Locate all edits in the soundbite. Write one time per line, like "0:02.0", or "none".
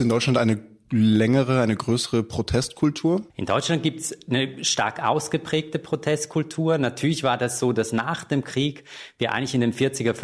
0:03.3